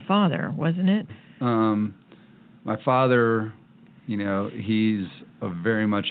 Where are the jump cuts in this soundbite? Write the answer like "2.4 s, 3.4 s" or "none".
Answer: 1.1 s

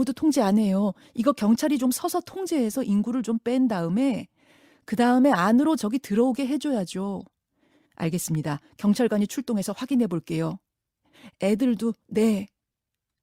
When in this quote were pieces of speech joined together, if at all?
7.9 s

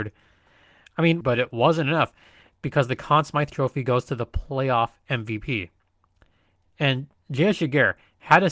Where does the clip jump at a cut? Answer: 1.2 s

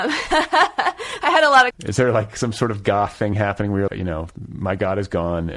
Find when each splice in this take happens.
1.7 s, 3.9 s

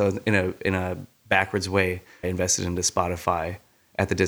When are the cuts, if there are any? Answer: 2.2 s

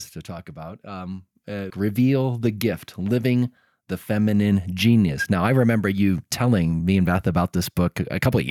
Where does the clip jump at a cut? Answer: 1.7 s

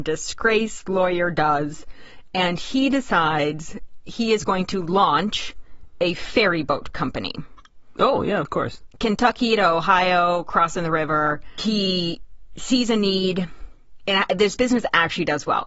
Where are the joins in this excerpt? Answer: none

